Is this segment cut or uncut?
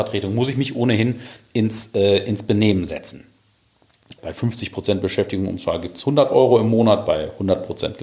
cut